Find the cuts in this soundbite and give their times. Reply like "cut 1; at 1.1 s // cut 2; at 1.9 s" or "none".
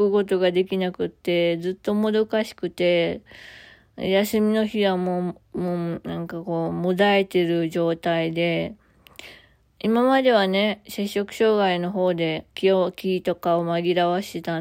cut 1; at 12.5 s